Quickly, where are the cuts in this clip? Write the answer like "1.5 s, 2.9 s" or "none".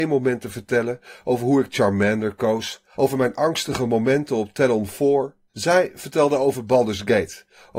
2.9 s, 5.5 s

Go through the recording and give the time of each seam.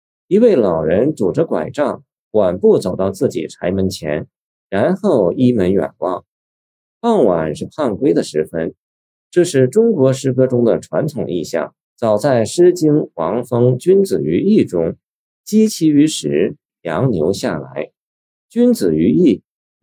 11.8 s, 16.7 s

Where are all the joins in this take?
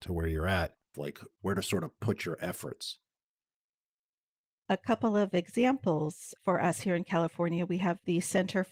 0.9 s

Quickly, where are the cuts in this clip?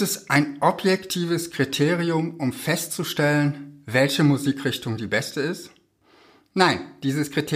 none

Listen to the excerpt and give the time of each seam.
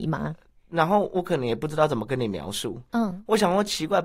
2.9 s

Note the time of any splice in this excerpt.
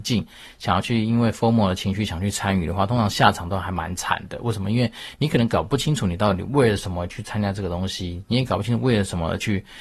none

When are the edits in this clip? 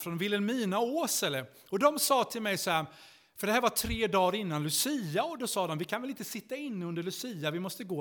none

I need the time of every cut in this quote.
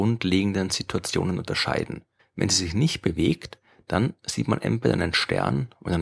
2.2 s

